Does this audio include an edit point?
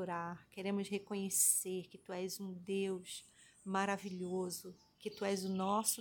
no; 0 cuts

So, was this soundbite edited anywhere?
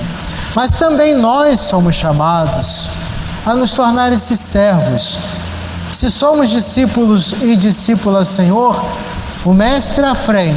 yes; 1 cut; at 9.4 s

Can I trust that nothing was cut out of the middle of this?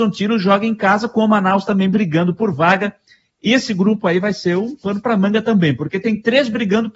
yes; 0 cuts

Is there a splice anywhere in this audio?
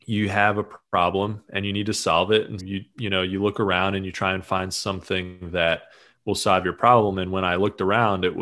yes; 1 cut; at 2.6 s

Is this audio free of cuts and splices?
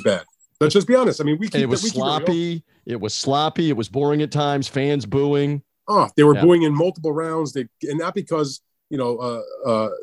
yes; 0 cuts

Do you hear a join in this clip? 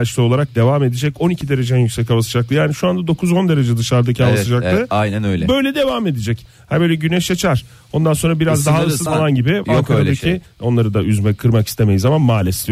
yes; 2 cuts; at 9.1 s, 10.5 s

